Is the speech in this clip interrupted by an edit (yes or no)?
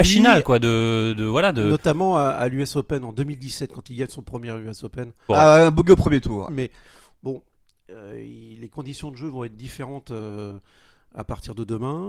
yes